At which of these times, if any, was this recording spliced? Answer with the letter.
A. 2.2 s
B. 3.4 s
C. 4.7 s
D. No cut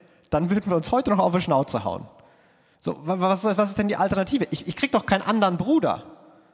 D